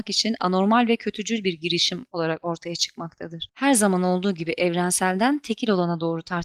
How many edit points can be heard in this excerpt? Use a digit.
1